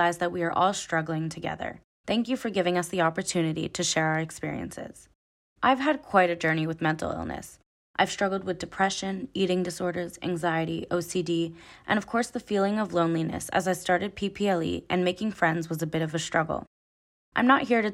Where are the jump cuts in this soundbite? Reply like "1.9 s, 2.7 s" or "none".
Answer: none